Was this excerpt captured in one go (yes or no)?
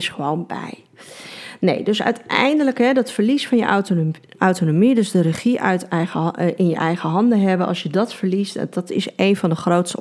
yes